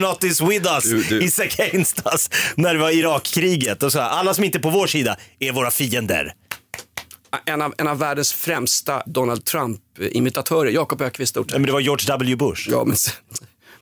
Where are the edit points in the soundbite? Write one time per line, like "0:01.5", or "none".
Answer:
0:09.1